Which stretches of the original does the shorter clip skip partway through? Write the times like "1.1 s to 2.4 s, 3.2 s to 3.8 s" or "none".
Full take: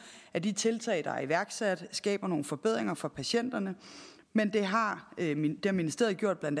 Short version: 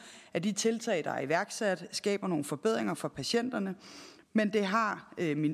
none